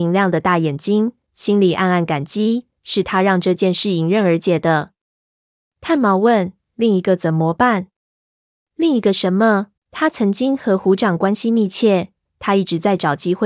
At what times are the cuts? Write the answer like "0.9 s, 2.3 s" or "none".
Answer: 9.8 s, 12.2 s